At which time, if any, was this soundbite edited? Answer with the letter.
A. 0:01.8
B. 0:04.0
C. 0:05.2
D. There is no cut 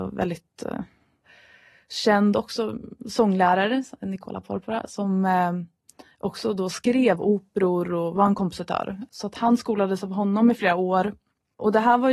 D